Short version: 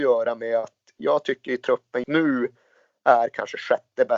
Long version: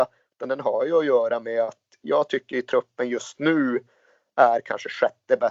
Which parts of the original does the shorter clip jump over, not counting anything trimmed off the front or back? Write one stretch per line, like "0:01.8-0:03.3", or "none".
0:03.1-0:03.4